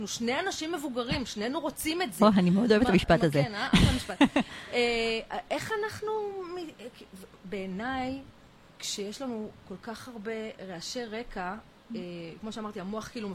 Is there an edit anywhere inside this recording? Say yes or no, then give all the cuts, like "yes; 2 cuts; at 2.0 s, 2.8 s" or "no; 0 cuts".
yes; 2 cuts; at 7.4 s, 12.4 s